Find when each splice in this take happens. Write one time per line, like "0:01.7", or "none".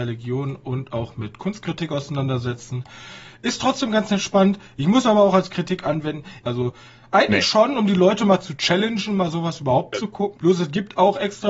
0:06.4
0:10.4

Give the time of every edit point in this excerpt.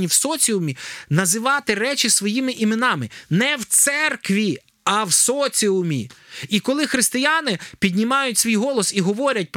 none

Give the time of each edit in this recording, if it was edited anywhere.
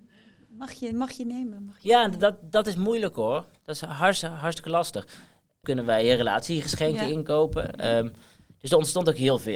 0:05.6

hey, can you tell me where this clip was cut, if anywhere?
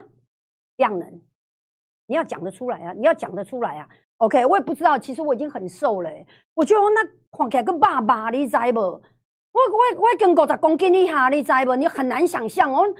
0:04.0

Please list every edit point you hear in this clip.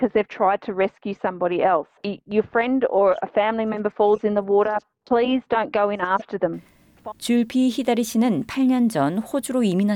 0:02.0
0:07.1

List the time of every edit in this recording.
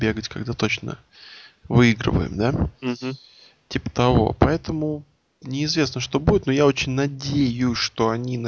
none

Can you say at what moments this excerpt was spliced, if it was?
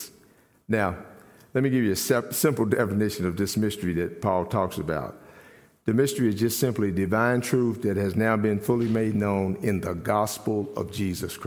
none

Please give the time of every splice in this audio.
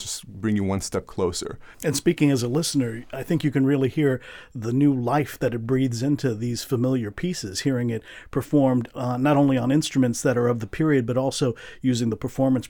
0:01.7

